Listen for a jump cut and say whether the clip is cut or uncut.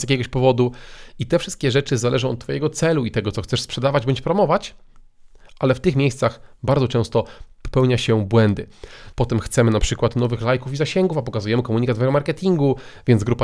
cut